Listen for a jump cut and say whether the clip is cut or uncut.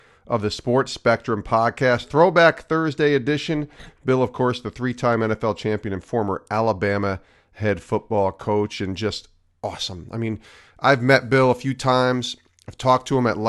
uncut